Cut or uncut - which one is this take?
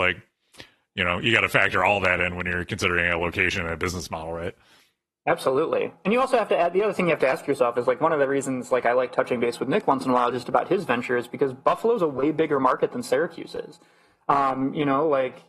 uncut